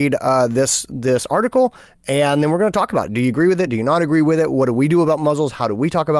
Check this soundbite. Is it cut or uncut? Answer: uncut